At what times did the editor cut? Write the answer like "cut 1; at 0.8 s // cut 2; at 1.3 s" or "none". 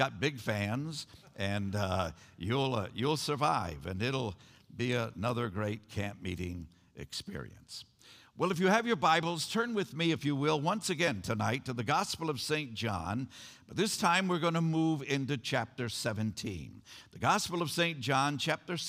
none